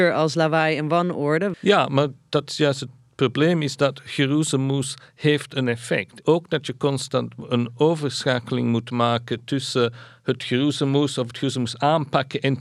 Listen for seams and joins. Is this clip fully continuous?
no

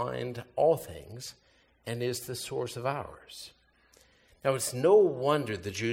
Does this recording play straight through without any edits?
yes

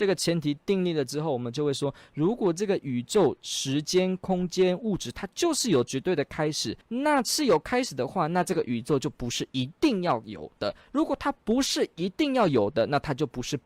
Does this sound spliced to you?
yes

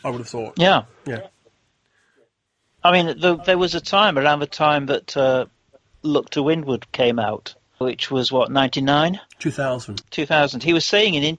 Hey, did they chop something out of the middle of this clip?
yes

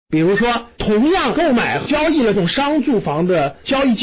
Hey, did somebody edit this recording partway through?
no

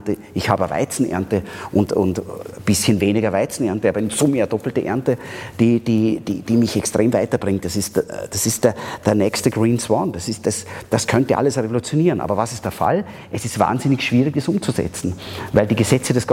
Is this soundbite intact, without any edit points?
no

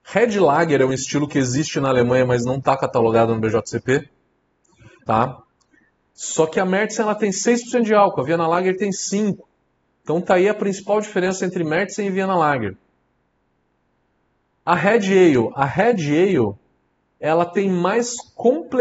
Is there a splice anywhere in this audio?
yes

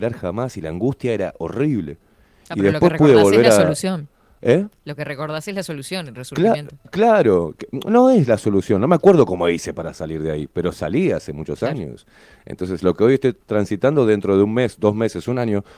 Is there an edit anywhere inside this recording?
no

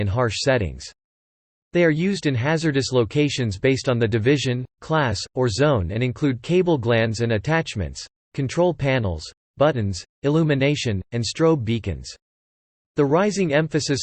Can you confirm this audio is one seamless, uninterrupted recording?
yes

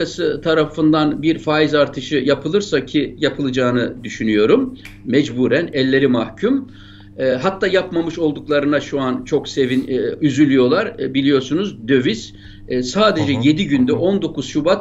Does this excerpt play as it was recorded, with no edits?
yes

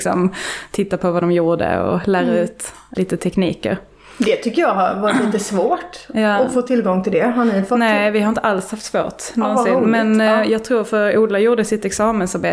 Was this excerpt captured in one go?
no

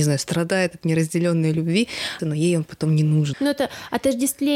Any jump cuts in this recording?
yes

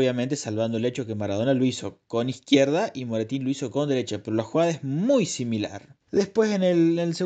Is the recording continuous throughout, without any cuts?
yes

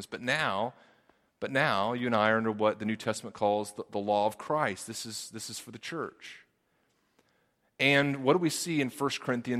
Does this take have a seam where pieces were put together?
no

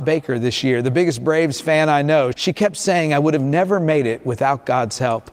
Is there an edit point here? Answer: yes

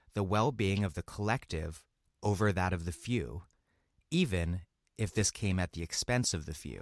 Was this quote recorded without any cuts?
yes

